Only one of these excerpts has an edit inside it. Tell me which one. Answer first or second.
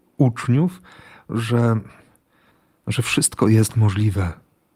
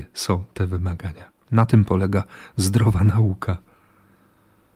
second